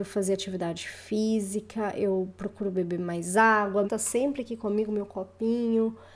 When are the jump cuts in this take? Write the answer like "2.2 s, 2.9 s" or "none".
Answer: 3.8 s